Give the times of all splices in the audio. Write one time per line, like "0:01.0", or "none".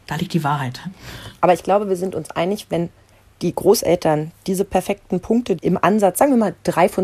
0:05.6